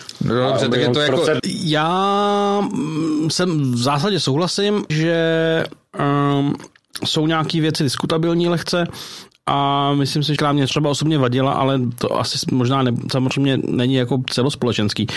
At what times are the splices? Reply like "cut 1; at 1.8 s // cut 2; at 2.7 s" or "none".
cut 1; at 1.4 s // cut 2; at 4.9 s // cut 3; at 10.4 s

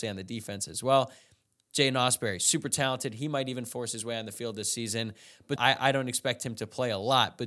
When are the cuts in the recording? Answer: cut 1; at 5.6 s

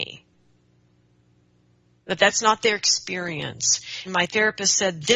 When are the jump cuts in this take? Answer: cut 1; at 2.0 s // cut 2; at 4.1 s

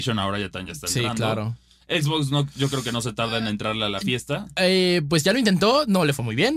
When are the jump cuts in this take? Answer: none

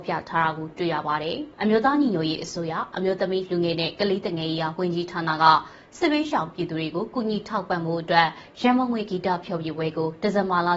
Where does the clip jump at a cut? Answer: cut 1; at 1.5 s

